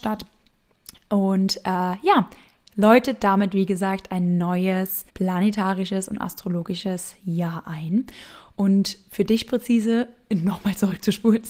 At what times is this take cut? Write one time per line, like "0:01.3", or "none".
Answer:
0:05.1